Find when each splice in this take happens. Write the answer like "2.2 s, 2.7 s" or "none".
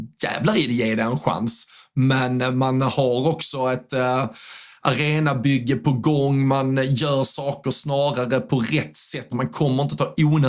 9.3 s

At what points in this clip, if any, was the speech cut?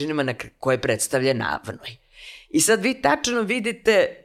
none

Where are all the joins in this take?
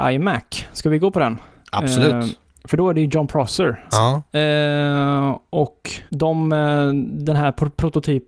3.9 s, 6.1 s

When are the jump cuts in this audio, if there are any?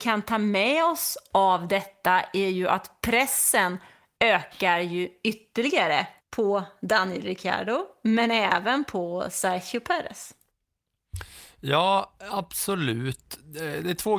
6.2 s

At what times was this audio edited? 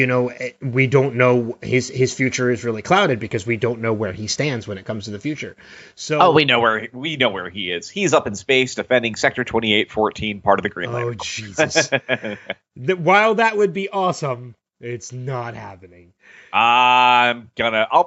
none

